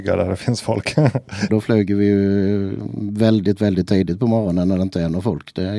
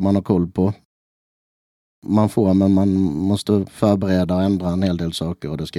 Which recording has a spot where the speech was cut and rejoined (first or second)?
first